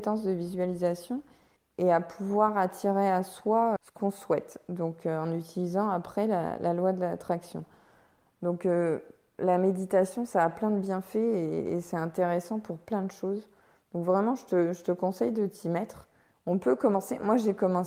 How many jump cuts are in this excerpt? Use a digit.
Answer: 1